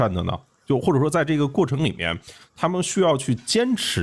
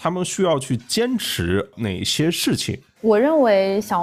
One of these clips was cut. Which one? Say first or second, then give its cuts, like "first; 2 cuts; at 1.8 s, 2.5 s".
second; 1 cut; at 3.0 s